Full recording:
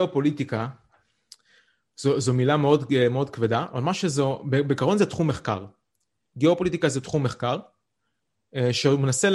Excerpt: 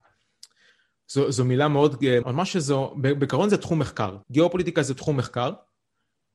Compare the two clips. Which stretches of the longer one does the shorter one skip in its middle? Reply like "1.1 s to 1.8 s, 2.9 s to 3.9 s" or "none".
3.1 s to 3.7 s, 5.7 s to 6.3 s